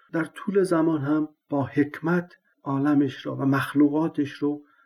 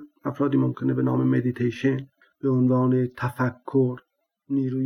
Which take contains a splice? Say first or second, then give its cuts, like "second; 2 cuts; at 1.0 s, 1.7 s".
first; 1 cut; at 1.4 s